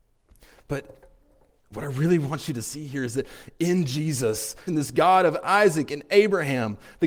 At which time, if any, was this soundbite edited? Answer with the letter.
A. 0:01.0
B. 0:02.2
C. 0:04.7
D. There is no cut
C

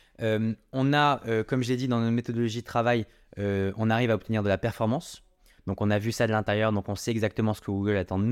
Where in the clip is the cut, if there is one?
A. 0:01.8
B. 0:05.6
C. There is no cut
B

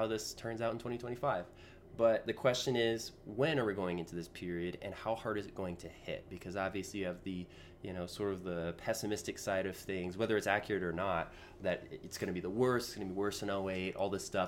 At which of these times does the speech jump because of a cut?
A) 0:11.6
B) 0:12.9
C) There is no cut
A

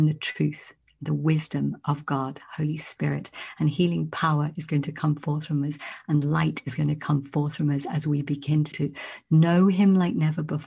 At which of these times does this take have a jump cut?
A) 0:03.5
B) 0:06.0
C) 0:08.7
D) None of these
C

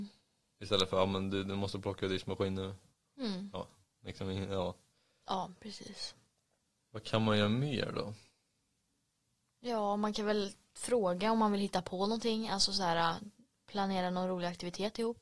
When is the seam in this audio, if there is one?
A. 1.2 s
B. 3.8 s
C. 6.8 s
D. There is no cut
D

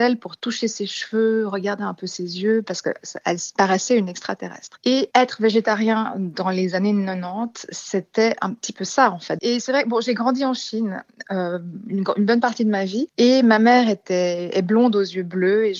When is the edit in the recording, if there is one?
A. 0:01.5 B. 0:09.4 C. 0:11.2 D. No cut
B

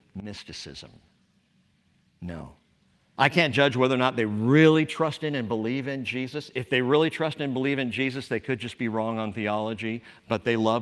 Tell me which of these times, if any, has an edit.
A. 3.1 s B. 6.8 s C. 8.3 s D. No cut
A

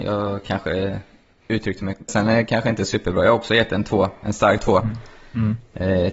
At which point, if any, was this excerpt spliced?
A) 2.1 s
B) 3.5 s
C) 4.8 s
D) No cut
A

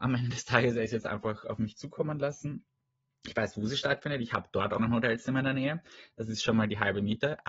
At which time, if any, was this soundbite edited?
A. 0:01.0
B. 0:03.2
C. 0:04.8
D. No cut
C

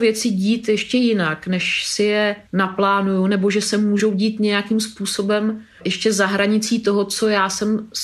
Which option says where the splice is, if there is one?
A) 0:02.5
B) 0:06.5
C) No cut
A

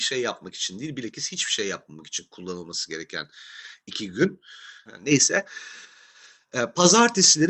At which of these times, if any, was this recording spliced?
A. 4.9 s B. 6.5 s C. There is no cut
A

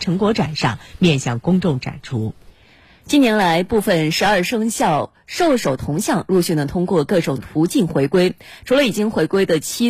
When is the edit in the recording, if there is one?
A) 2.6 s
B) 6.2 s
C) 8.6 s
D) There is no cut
D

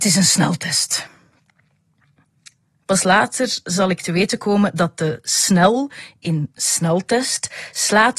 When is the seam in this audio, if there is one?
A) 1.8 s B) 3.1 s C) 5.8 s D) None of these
D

